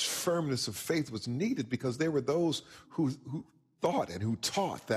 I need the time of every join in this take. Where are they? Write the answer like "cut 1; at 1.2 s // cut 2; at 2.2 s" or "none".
cut 1; at 2.8 s